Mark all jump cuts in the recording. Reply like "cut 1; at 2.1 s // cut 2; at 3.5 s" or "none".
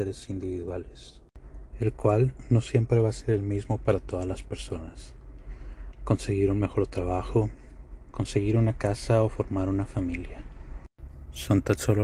cut 1; at 8.1 s